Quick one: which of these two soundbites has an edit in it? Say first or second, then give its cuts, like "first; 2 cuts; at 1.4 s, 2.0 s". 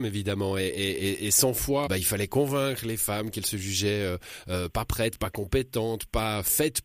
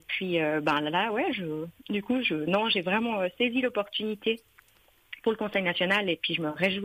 first; 1 cut; at 1.9 s